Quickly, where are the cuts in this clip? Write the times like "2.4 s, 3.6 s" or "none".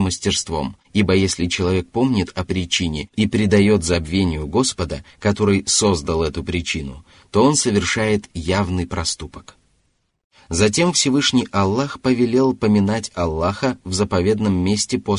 none